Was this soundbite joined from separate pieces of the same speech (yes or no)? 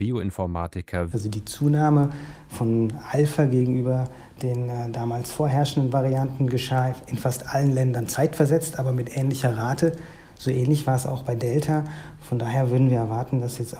yes